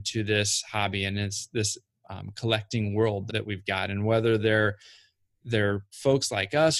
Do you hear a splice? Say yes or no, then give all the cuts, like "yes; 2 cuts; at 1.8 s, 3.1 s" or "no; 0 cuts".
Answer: yes; 1 cut; at 3.3 s